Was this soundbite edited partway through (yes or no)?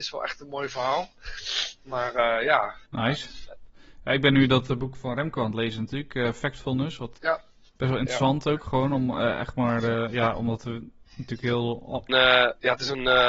yes